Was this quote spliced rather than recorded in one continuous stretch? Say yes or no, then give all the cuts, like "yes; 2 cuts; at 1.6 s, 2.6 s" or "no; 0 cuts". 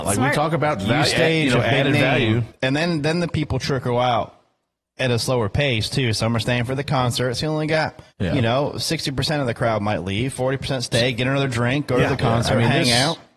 yes; 1 cut; at 8.1 s